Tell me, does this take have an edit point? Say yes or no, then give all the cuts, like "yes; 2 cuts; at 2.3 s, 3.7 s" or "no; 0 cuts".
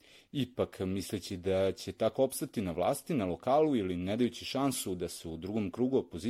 no; 0 cuts